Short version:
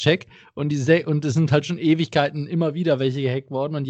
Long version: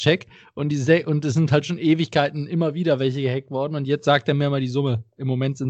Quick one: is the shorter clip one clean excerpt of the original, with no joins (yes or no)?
yes